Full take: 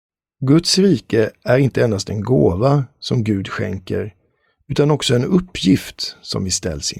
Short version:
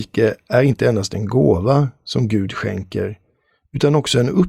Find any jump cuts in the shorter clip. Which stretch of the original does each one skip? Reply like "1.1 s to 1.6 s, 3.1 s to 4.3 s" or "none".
none